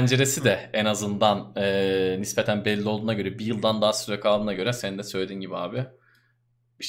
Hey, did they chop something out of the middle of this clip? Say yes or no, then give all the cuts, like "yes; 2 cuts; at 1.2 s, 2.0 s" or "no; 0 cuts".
no; 0 cuts